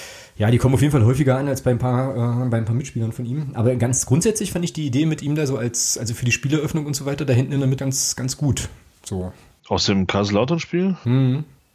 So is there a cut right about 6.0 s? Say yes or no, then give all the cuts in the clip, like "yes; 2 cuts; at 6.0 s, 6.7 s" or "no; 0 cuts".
no; 2 cuts; at 7.8 s, 9.6 s